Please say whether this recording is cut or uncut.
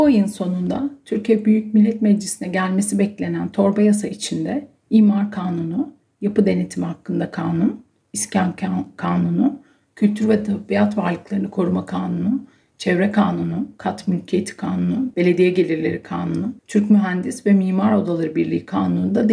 cut